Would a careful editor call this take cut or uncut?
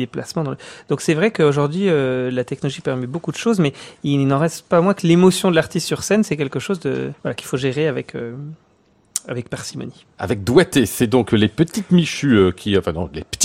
cut